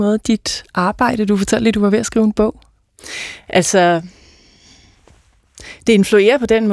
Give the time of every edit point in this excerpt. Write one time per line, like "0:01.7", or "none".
none